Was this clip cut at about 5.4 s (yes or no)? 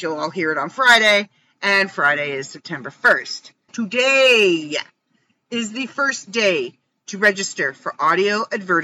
no